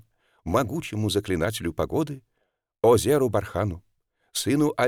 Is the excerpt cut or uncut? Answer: uncut